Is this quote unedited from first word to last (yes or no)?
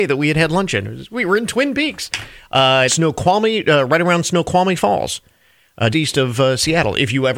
no